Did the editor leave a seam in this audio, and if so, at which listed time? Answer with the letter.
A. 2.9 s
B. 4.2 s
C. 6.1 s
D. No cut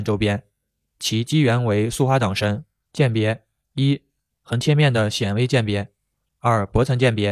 A